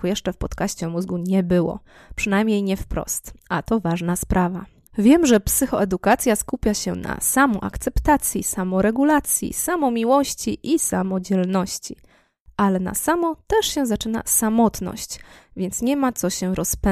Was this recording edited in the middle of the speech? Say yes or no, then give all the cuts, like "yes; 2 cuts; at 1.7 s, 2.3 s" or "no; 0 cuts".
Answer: no; 0 cuts